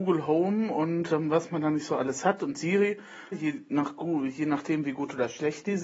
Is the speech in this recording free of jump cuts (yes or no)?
no